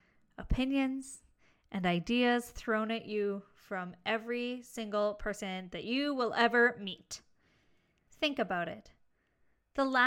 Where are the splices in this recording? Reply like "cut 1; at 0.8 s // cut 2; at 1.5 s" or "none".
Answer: cut 1; at 8.1 s

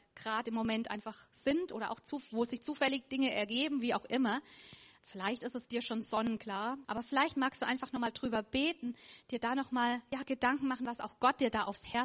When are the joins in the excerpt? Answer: cut 1; at 5.0 s // cut 2; at 6.8 s

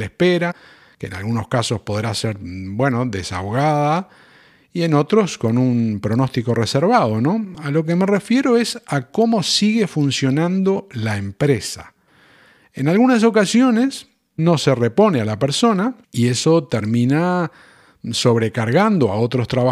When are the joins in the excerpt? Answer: cut 1; at 16.0 s

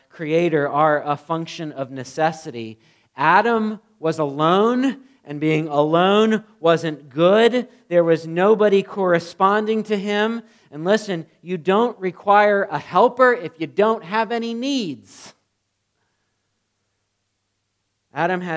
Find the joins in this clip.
none

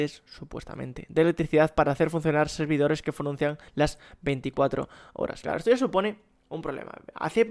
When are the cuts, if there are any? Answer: cut 1; at 3.7 s

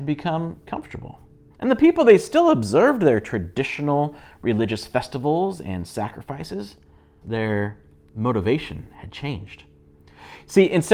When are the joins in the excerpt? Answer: cut 1; at 1.5 s // cut 2; at 7.2 s

